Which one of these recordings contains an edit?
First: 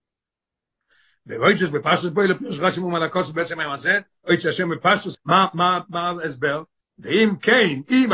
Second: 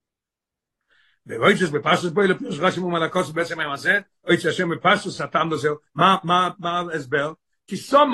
first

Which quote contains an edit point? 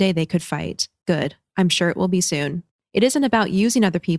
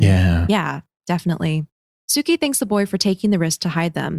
first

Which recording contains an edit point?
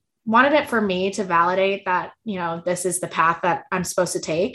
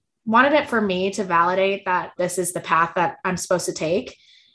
second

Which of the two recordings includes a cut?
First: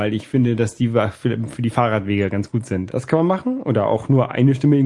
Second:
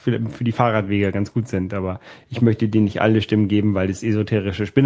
first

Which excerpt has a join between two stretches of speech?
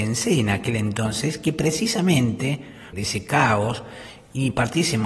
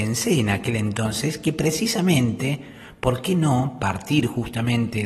first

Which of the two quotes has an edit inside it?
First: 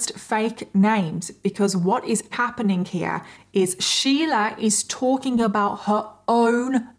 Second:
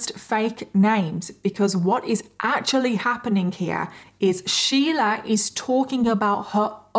first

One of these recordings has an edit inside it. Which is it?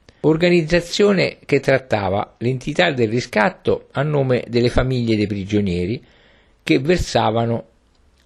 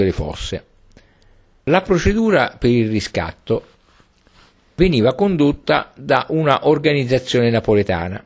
second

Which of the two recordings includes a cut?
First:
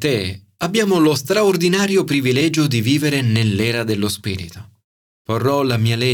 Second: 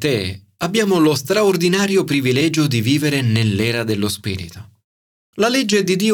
first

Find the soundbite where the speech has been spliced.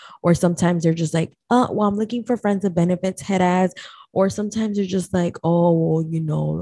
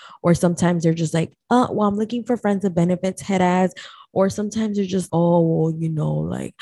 second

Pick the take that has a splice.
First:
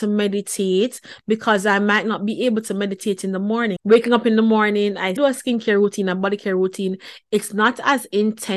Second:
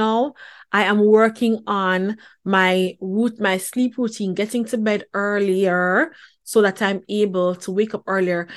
first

